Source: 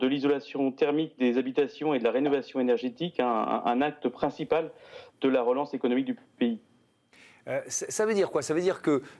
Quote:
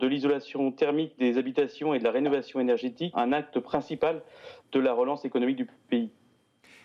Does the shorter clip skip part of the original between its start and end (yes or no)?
yes